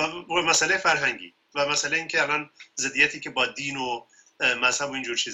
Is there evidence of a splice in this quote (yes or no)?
no